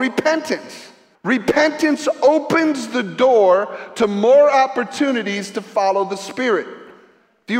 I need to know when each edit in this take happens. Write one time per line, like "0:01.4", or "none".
0:01.1

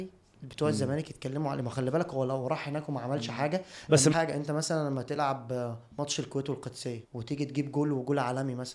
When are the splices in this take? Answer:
0:04.1
0:07.0

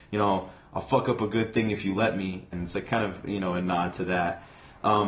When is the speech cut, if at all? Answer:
0:02.5

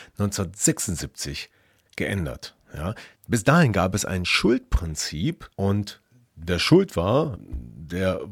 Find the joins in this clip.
0:03.2
0:05.5
0:07.4

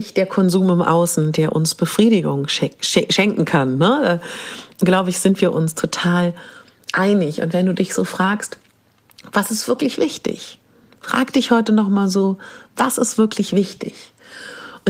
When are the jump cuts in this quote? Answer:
none

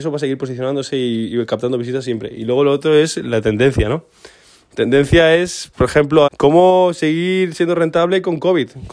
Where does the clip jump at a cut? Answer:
0:06.3

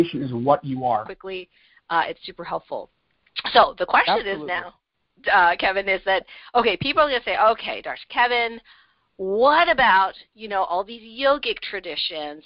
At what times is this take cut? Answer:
0:01.1

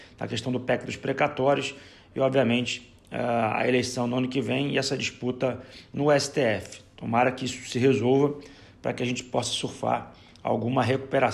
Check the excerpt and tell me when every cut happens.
none

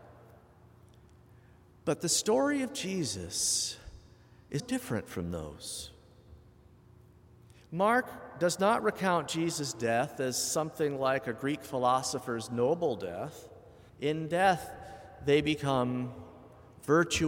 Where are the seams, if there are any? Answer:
0:04.6
0:13.9

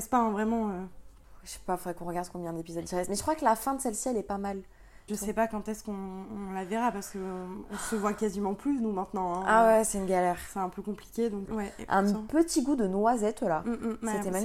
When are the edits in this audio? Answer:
0:05.1
0:11.5

